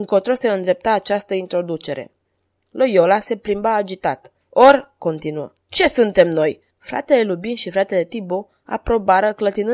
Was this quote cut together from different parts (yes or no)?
yes